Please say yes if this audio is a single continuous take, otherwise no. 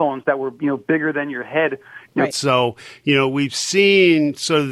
no